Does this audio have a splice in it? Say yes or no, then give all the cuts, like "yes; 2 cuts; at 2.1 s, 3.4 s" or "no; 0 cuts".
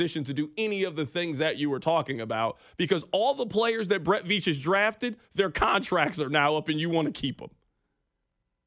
no; 0 cuts